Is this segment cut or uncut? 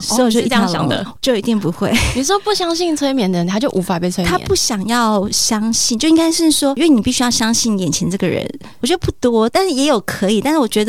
cut